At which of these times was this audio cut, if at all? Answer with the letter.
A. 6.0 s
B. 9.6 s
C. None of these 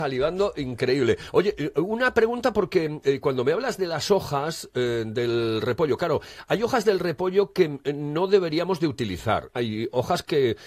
B